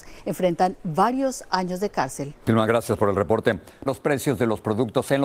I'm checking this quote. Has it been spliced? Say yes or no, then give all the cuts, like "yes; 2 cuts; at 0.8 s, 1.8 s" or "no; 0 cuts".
yes; 2 cuts; at 2.4 s, 3.9 s